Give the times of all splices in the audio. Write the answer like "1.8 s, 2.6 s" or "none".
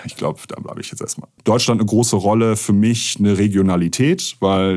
1.4 s

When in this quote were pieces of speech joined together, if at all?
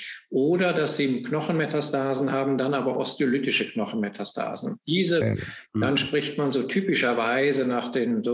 5.2 s

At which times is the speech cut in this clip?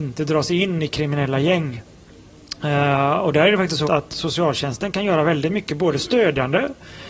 3.8 s

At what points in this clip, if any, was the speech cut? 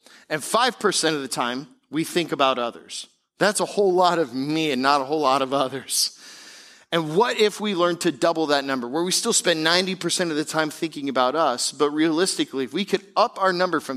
none

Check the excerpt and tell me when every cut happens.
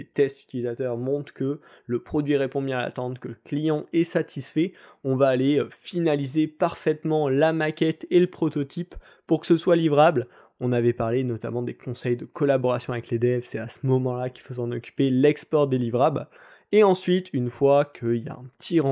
none

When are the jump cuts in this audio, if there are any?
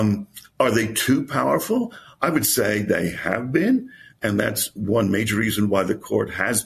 none

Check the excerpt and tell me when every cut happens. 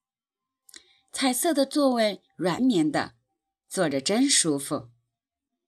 2.6 s

